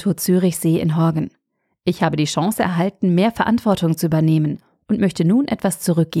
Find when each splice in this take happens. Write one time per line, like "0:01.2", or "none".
none

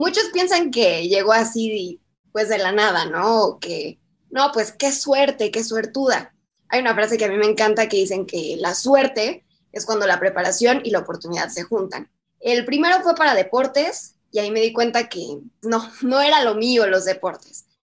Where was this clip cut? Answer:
0:12.2
0:15.6

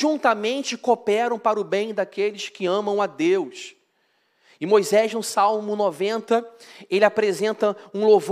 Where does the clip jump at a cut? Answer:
none

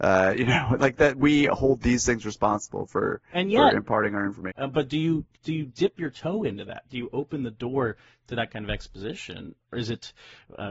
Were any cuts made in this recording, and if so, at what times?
0:04.5
0:09.6

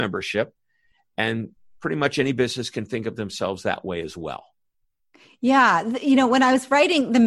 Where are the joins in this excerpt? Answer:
none

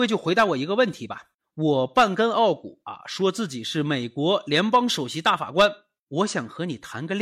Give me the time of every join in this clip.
none

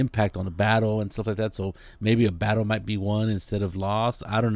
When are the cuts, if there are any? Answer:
none

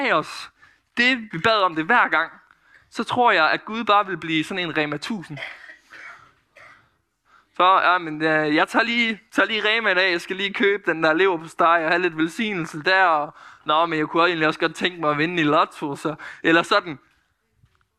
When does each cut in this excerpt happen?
0:01.3

